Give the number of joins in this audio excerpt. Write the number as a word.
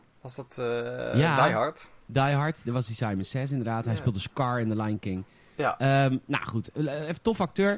zero